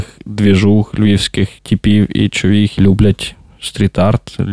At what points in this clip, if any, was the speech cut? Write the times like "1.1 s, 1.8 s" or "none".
1.6 s, 2.8 s